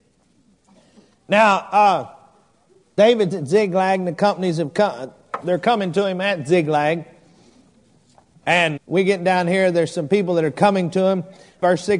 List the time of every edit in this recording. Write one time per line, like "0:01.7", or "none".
0:08.8